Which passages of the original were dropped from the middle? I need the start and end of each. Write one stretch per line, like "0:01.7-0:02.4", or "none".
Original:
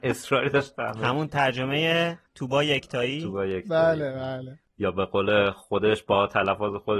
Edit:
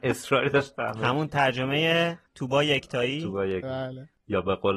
0:03.6-0:04.1